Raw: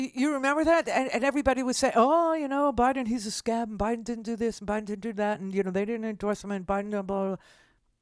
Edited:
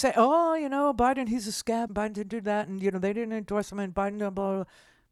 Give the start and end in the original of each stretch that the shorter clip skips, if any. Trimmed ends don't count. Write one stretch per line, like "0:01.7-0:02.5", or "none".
0:03.7-0:04.6